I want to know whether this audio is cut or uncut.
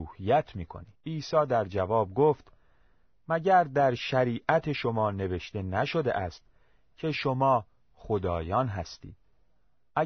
cut